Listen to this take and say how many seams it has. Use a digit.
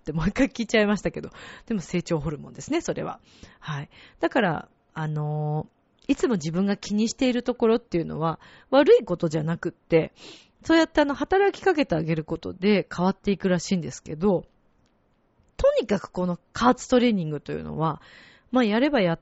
0